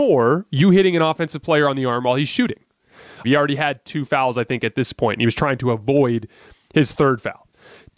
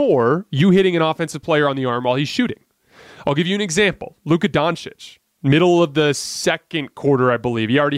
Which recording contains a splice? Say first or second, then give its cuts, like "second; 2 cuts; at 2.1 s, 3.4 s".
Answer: first; 1 cut; at 3.2 s